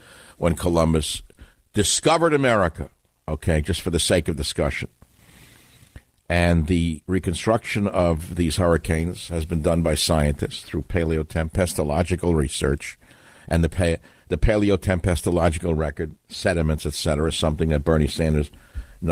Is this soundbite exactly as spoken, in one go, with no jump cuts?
yes; 0 cuts

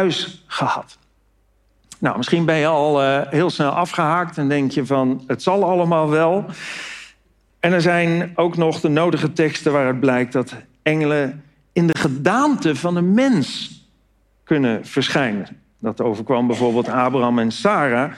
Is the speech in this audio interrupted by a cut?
yes; 1 cut; at 7.5 s

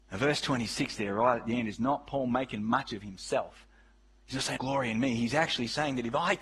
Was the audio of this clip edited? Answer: yes; 1 cut; at 4.6 s

